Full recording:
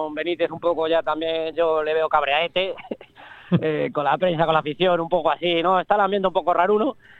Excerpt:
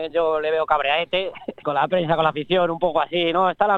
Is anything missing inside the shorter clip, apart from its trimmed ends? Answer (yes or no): yes